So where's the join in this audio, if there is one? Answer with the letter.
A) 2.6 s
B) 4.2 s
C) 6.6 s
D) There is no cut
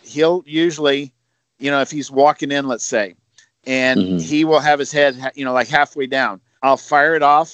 C